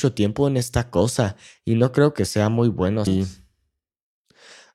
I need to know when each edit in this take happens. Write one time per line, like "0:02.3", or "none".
0:03.1